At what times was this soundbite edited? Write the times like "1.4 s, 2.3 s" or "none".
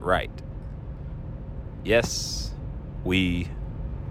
none